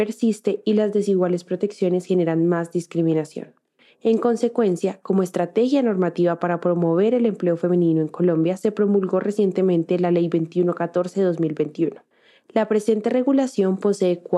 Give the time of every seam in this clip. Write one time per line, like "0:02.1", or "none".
none